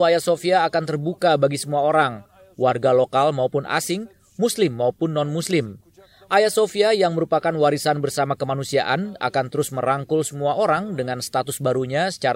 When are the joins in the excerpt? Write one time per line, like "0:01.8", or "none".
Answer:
none